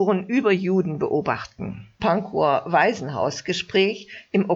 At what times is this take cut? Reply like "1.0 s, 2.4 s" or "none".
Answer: 2.0 s